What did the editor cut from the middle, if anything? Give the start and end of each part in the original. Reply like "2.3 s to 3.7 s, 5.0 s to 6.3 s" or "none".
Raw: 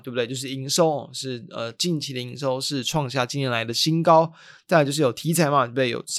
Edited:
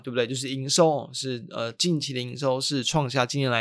none